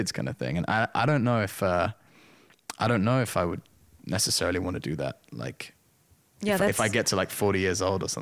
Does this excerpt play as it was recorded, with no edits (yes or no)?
yes